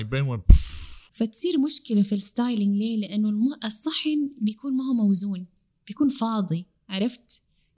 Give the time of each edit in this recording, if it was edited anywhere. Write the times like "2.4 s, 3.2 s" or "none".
1.1 s

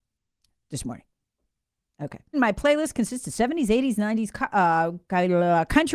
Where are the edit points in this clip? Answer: 2.3 s

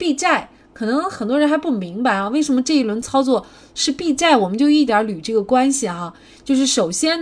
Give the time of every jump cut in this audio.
4.9 s

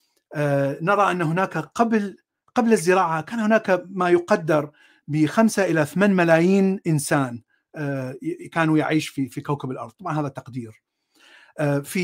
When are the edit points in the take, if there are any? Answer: none

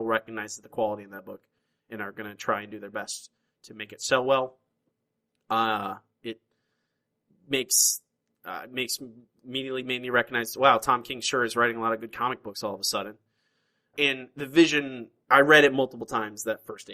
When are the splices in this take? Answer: 13.9 s, 15.2 s

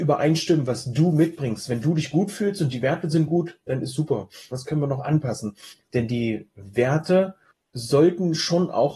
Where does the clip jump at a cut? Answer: 4.5 s, 5.8 s

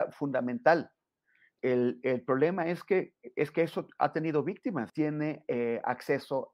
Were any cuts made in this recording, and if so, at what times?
1.6 s, 4.9 s

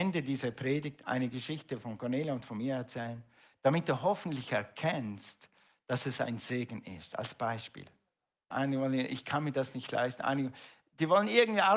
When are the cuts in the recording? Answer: 8.5 s

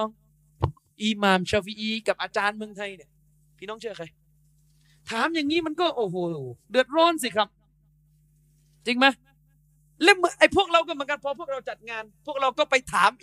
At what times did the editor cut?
none

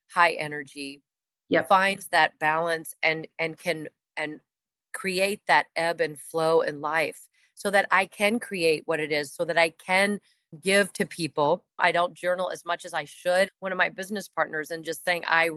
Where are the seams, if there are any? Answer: 10.5 s, 11.8 s, 13.5 s

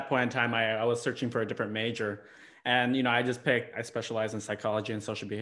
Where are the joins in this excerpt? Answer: 3.7 s

